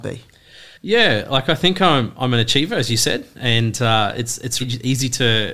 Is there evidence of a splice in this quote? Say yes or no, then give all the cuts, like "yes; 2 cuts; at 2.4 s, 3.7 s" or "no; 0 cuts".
yes; 1 cut; at 4.6 s